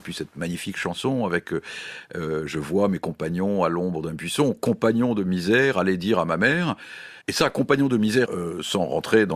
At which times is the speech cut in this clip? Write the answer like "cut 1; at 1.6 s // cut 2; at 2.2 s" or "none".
cut 1; at 7.2 s // cut 2; at 8.3 s